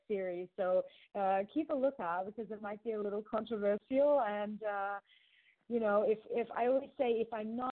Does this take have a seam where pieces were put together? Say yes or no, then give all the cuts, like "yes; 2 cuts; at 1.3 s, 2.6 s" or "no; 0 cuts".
no; 0 cuts